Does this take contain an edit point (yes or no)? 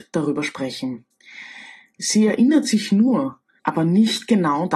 yes